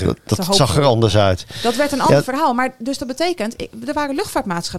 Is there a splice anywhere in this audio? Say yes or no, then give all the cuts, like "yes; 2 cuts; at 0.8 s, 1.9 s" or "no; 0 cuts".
no; 0 cuts